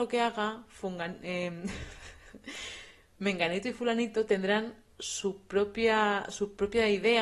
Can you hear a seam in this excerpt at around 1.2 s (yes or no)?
no